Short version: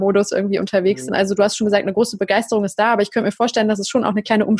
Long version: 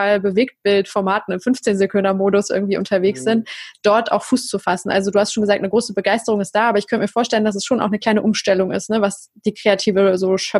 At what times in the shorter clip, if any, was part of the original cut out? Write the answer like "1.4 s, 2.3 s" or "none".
1.1 s

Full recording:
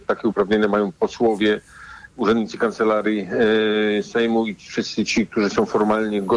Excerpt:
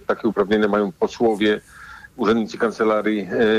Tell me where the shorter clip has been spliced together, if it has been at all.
none

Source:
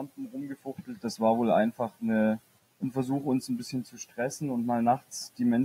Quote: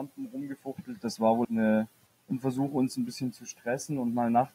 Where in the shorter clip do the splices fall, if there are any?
1.4 s

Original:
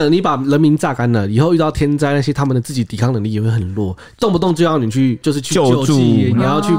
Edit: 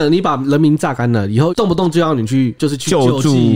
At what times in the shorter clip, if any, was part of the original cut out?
1.5 s

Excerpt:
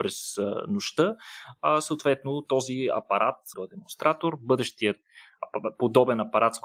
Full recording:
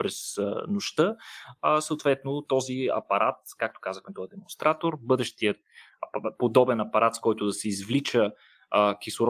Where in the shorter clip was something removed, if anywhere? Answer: 3.5 s

